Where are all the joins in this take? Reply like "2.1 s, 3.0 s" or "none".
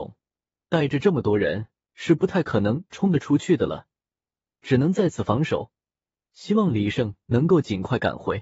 none